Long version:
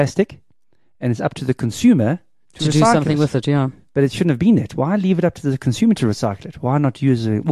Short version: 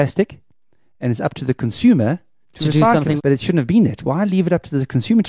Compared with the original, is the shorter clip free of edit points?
no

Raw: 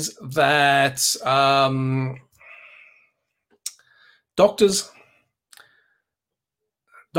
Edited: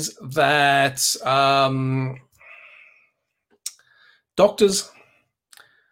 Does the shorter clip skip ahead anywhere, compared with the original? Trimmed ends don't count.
no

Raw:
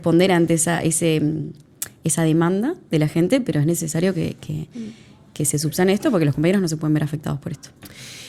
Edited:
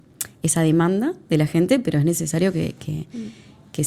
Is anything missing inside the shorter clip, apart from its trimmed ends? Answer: no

